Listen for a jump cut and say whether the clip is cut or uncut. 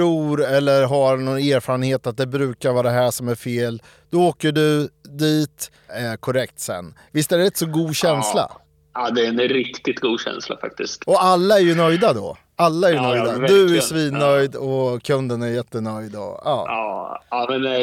cut